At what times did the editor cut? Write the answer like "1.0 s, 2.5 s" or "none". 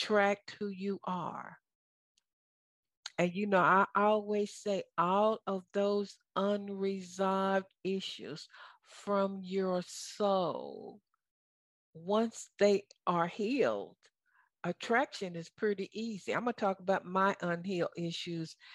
none